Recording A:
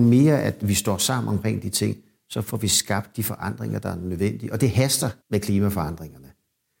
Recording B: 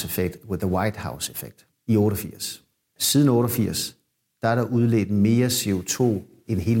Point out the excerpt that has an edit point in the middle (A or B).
A